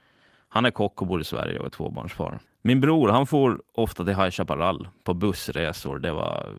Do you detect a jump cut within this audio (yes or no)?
yes